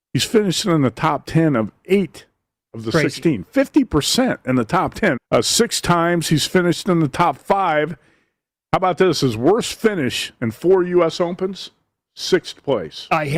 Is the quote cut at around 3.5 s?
no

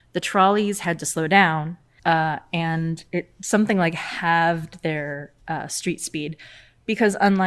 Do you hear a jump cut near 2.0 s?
yes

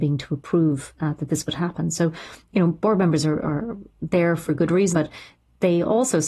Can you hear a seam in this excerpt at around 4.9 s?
yes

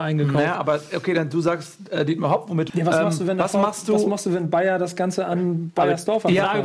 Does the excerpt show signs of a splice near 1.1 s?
no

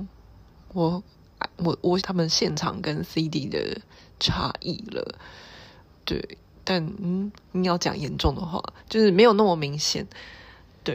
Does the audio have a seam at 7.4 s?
yes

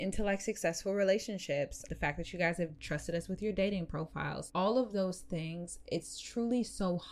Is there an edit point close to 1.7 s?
no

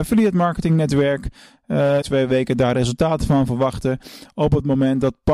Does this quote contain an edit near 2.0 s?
yes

